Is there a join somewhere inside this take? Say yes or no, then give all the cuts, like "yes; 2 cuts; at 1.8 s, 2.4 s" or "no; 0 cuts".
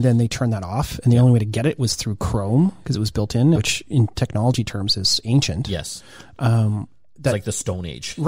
yes; 1 cut; at 3.5 s